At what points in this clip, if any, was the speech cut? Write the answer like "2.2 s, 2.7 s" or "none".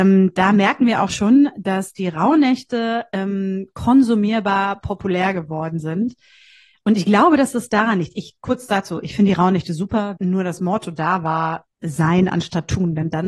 10.2 s, 11.7 s